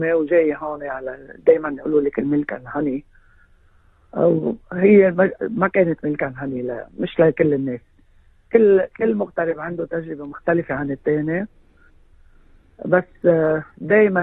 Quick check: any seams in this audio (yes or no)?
no